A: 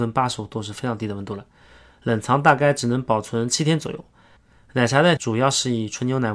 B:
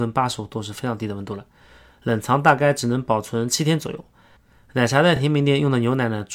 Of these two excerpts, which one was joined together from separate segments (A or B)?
A